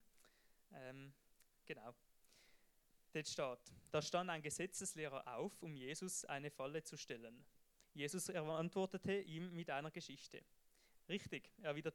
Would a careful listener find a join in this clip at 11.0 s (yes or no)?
yes